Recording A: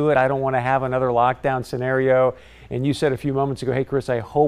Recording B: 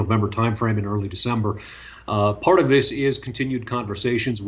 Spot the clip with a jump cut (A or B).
B